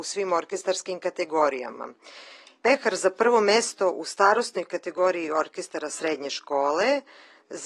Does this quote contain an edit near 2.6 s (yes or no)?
yes